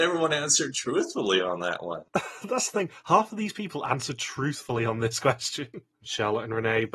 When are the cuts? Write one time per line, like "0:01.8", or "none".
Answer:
0:02.1
0:05.9